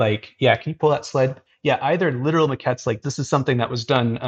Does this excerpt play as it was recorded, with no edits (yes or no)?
no